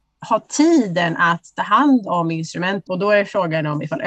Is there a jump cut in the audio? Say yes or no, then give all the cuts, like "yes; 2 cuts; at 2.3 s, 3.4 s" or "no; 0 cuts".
yes; 1 cut; at 2.9 s